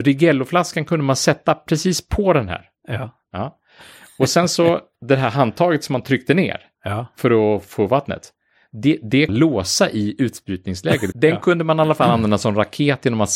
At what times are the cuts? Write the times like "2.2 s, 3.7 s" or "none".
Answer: 9.3 s, 11.1 s